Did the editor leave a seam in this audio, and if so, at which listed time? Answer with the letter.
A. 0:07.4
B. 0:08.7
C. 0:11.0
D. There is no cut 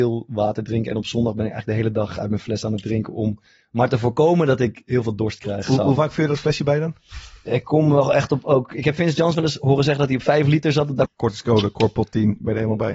C